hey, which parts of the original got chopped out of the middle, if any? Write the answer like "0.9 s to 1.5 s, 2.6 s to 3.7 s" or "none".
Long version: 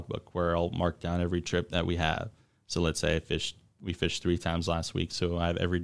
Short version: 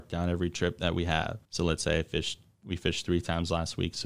2.4 s to 2.6 s